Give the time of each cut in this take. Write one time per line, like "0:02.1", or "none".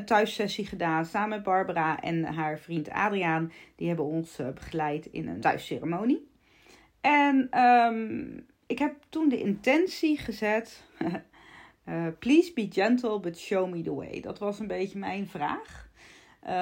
0:05.4